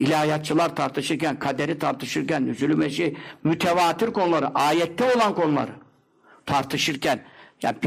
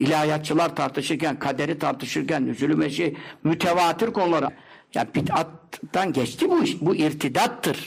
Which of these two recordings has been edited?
second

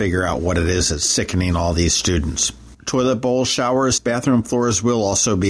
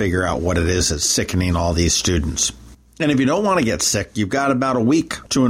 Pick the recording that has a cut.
first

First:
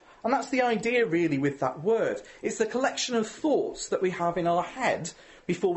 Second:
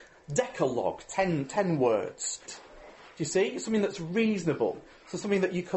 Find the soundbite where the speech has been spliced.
second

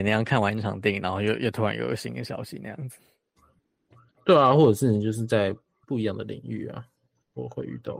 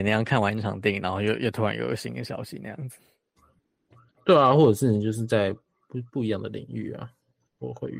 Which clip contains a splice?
first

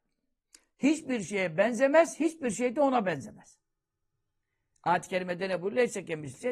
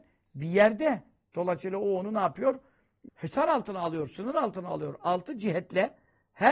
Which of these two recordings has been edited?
second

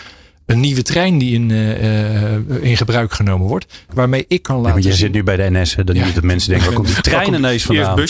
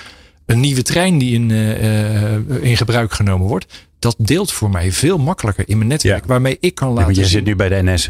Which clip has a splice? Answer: first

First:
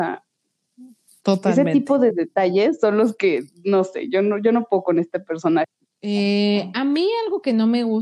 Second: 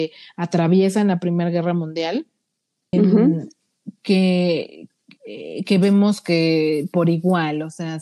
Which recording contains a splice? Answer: second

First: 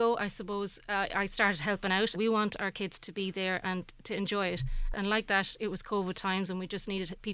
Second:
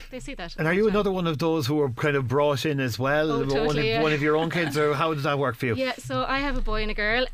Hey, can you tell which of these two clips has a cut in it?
first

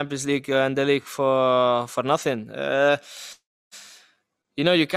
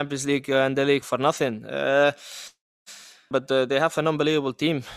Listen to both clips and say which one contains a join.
second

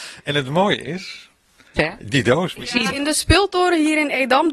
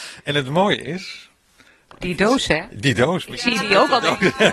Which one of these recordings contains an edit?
first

